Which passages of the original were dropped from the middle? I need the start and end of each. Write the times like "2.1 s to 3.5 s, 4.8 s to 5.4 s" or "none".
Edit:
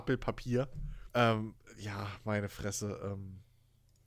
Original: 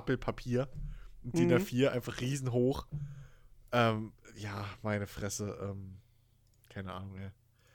1.1 s to 3.7 s